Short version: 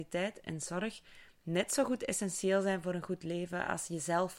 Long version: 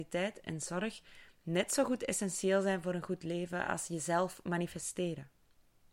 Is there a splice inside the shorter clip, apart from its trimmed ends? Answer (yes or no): no